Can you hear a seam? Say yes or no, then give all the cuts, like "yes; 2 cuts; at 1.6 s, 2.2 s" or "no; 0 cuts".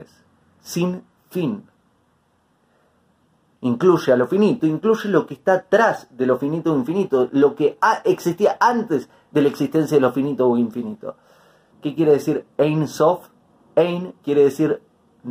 yes; 3 cuts; at 3.6 s, 4.6 s, 11.7 s